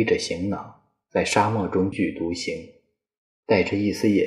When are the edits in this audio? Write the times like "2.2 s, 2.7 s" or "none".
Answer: 1.9 s